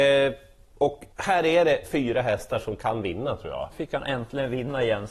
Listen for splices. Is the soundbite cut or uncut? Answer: cut